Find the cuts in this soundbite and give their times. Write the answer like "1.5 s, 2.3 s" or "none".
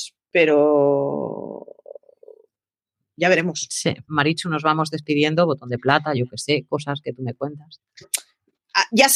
4.1 s, 8.0 s